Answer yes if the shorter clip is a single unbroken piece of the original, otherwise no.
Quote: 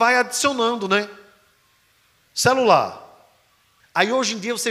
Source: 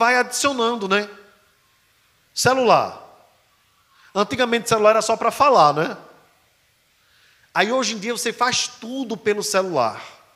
no